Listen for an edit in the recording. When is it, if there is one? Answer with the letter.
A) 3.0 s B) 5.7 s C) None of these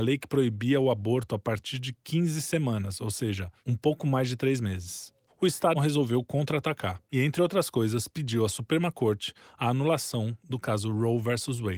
B